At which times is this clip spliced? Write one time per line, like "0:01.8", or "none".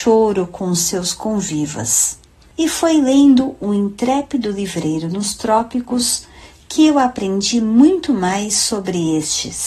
none